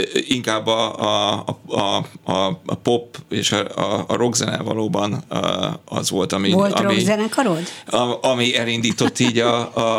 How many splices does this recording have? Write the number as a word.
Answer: zero